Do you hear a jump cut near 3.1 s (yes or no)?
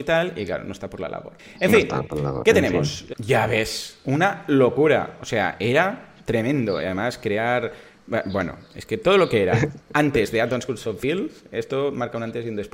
yes